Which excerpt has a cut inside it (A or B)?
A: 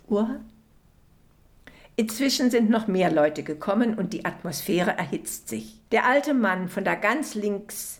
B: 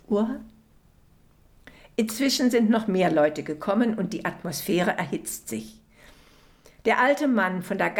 A